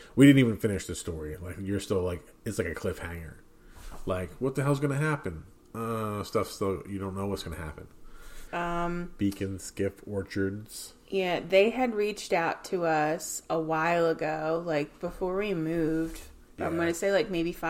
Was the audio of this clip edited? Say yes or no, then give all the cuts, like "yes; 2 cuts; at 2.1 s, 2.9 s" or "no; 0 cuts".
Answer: yes; 1 cut; at 8.5 s